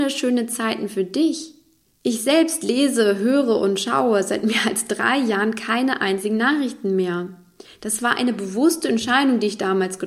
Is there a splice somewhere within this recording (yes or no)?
no